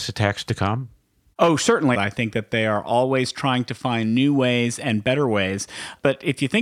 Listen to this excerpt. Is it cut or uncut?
cut